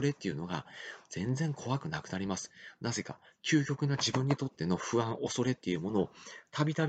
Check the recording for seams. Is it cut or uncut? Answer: uncut